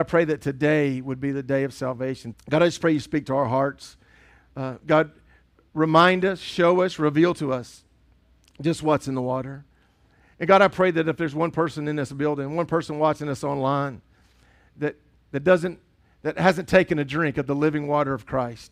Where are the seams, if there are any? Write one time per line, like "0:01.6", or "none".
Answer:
0:02.3